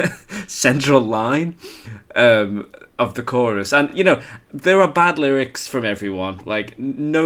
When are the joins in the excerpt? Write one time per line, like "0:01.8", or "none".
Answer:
none